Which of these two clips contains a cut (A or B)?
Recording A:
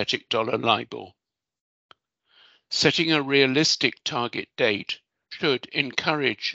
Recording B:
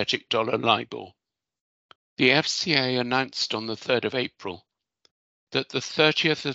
B